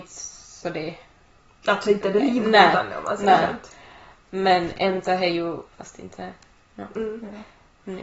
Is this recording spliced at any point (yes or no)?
yes